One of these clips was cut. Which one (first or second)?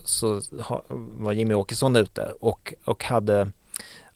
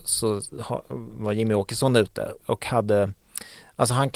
second